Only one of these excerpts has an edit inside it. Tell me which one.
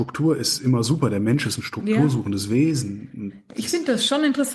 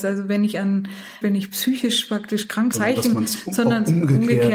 second; 2 cuts; at 1.2 s, 2.7 s

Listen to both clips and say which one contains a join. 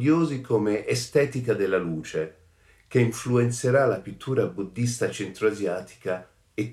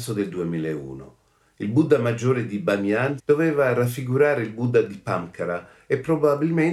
second; 1 cut; at 3.2 s

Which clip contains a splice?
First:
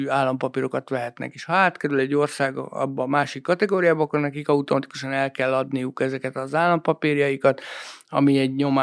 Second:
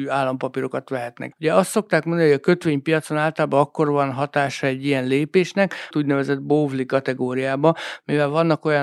second; 2 cuts; at 1.3 s, 5.9 s

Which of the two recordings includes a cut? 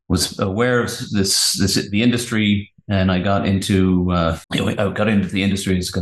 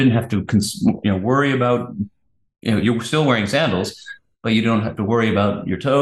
first; 1 cut; at 4.4 s

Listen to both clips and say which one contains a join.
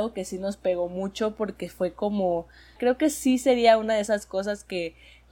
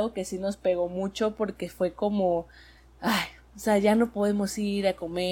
first; 1 cut; at 2.8 s

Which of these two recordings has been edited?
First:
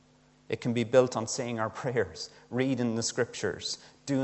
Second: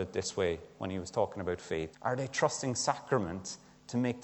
second; 1 cut; at 1.9 s

